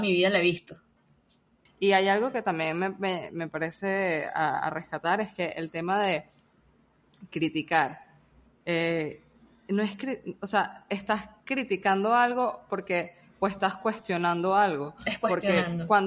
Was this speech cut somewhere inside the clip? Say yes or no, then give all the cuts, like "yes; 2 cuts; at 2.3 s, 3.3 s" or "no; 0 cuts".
yes; 1 cut; at 1.7 s